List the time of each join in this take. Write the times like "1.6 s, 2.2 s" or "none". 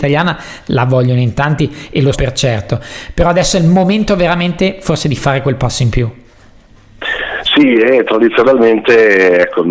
2.1 s